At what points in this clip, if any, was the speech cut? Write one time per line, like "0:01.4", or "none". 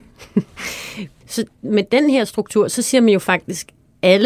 0:01.2